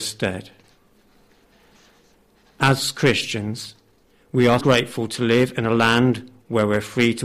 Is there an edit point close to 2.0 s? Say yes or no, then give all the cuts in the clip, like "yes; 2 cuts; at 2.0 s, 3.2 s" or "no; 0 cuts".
no; 1 cut; at 4.6 s